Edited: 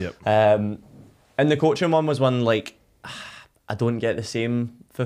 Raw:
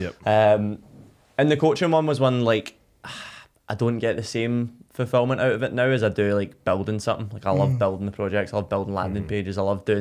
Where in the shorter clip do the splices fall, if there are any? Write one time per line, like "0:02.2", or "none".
none